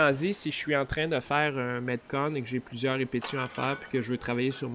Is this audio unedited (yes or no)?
yes